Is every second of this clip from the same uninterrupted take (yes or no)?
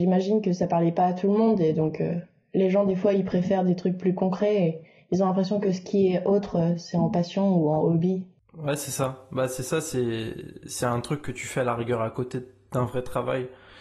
yes